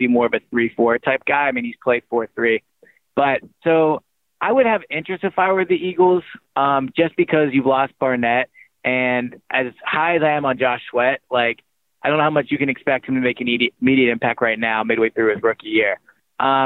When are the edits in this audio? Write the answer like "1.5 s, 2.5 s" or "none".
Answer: none